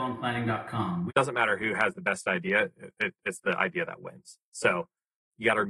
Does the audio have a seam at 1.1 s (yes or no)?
yes